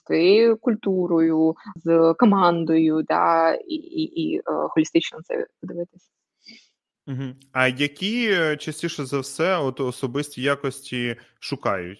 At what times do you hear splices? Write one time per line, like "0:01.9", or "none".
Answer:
0:01.8